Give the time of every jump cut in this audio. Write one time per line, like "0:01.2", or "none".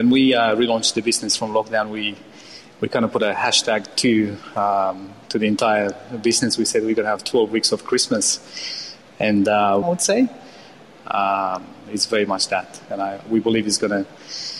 0:09.8

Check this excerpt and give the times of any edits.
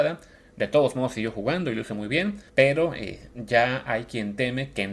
0:02.5

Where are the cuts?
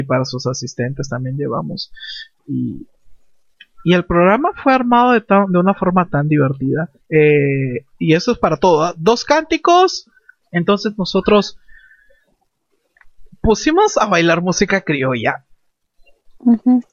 0:07.0
0:10.4

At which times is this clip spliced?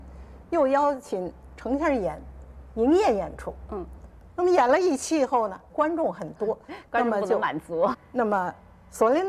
0:05.7
0:07.9

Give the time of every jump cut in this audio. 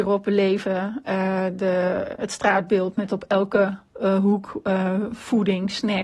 0:02.2

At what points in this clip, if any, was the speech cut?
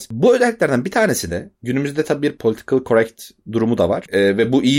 none

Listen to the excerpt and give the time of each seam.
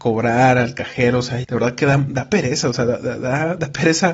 0:01.4

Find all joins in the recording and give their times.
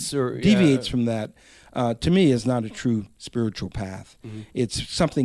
none

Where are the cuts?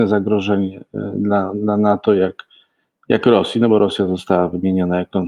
none

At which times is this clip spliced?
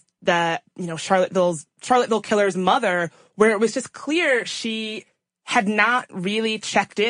none

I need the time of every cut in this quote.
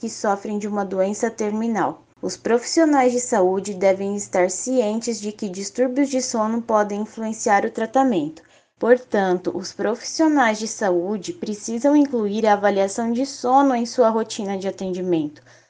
0:02.1
0:08.8

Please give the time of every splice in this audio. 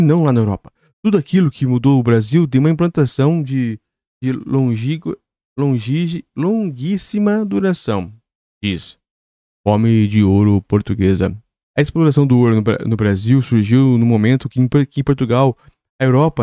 0:11.6

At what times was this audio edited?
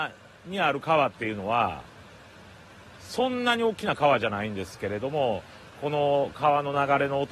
none

